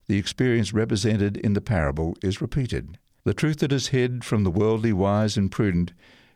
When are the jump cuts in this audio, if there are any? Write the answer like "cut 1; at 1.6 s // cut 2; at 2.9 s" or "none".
cut 1; at 3.2 s

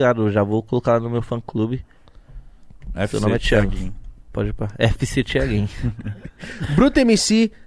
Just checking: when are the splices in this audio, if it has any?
none

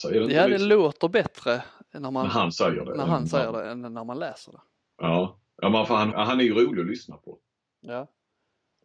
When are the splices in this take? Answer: cut 1; at 6.1 s

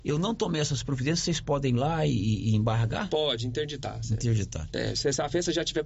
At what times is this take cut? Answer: none

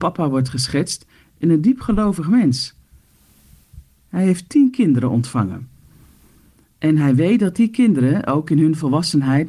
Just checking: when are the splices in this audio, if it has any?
cut 1; at 3.9 s

